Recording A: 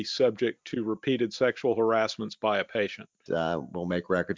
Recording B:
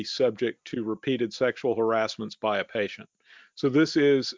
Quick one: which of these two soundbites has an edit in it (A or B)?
A